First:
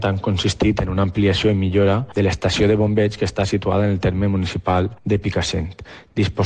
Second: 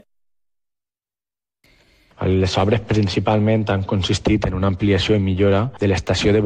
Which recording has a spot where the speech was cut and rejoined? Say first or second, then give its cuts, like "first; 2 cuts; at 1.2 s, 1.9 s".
second; 1 cut; at 2.1 s